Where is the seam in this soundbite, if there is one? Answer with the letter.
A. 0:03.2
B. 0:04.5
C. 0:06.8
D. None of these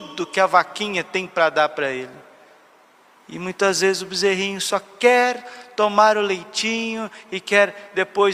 D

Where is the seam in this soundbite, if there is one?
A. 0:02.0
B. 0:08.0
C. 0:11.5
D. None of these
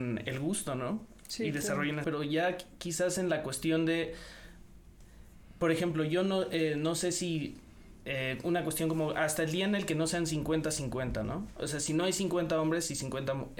A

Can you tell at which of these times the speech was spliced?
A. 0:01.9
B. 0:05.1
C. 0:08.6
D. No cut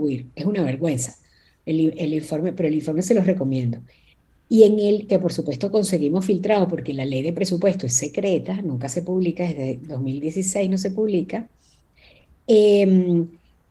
B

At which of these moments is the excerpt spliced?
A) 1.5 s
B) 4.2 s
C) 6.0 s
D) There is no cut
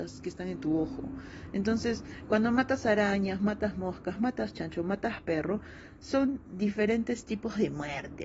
B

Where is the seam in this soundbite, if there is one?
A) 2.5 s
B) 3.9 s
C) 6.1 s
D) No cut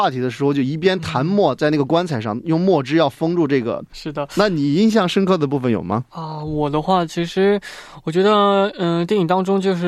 B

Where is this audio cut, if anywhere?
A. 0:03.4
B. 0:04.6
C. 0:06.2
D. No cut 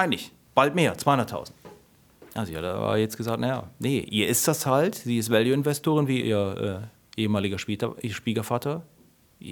C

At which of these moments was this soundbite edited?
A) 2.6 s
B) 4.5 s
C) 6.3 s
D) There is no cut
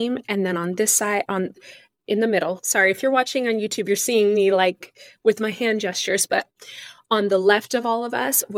D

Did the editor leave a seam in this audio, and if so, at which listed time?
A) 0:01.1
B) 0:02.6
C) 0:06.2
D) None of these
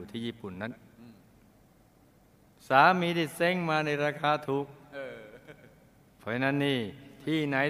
D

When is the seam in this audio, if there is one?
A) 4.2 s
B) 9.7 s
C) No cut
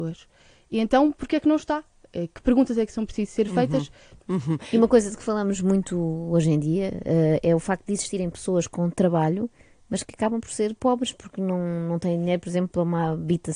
A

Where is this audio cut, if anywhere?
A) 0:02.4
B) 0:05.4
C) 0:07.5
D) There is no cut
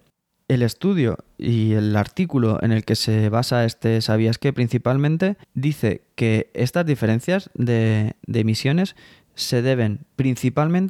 B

